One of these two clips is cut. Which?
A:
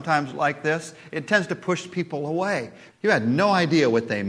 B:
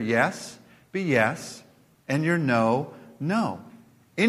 A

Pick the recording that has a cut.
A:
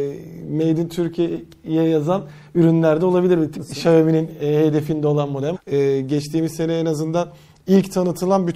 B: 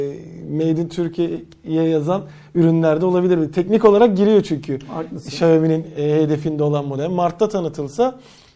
A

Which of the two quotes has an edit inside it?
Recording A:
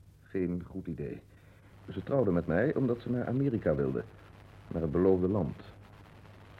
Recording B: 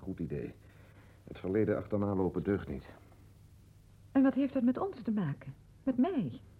A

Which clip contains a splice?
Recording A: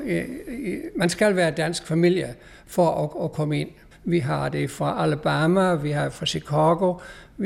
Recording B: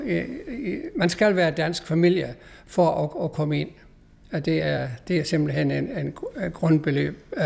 A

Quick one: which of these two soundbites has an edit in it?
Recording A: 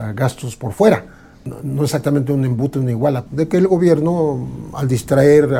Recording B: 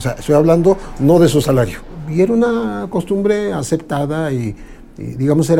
A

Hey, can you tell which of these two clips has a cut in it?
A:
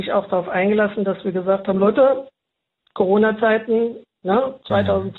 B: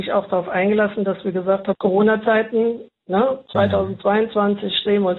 B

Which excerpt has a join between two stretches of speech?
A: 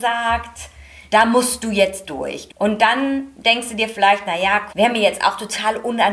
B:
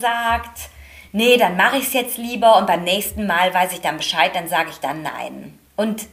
A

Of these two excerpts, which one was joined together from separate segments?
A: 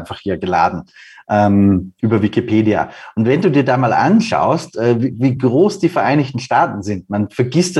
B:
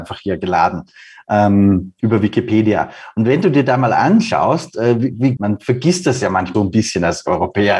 B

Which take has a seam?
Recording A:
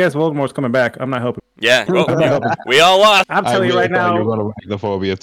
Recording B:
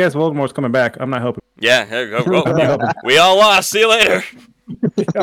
A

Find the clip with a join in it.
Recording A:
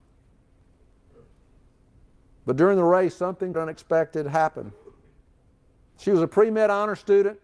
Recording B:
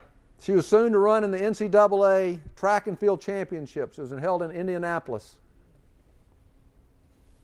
A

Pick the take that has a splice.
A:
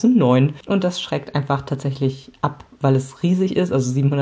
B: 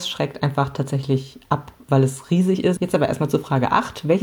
B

